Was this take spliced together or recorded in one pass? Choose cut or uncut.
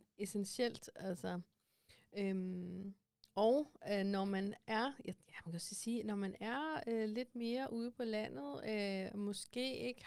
uncut